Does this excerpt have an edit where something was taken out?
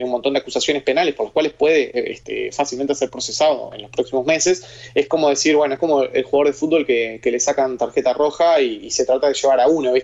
no; 0 cuts

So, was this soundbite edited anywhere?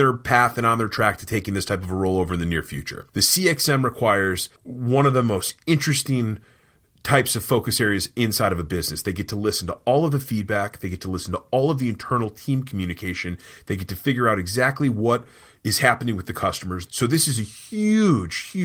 yes; 3 cuts; at 3.1 s, 4.6 s, 16.9 s

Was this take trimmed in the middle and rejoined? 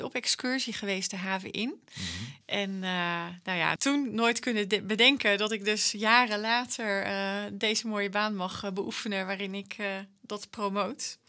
yes; 2 cuts; at 2.4 s, 3.8 s

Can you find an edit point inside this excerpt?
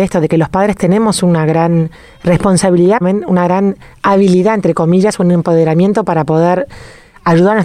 yes; 1 cut; at 3.0 s

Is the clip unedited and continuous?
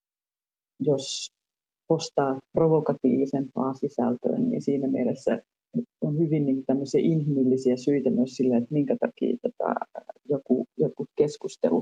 no; 1 cut; at 4.4 s

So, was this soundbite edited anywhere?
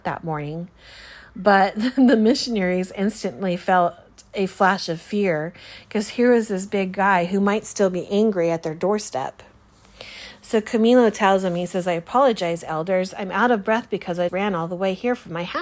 yes; 1 cut; at 14.3 s

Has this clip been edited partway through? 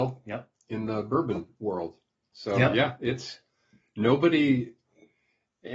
no; 0 cuts

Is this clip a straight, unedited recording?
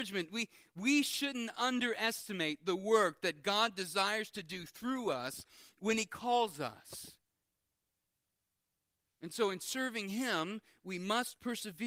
yes; 0 cuts

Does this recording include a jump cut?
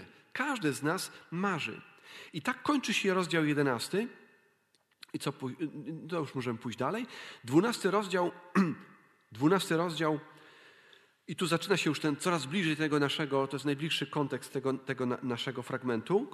no; 0 cuts

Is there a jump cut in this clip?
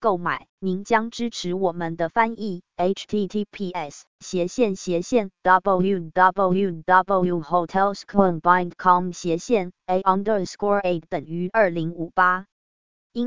yes; 1 cut; at 11.9 s

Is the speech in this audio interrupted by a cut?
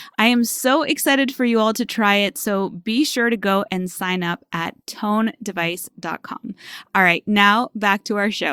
no; 0 cuts

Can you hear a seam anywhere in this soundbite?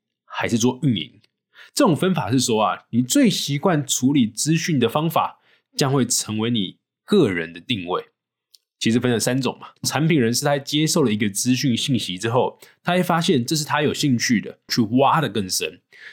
yes; 2 cuts; at 9.8 s, 14.7 s

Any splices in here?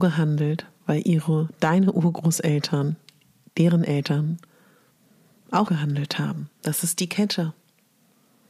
yes; 1 cut; at 5.7 s

